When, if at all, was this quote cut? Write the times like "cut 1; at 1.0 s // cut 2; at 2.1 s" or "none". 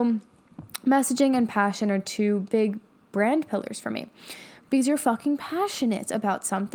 cut 1; at 4.6 s